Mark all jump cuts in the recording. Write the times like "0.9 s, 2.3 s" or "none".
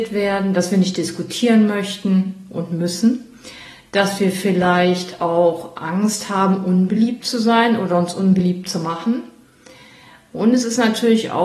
none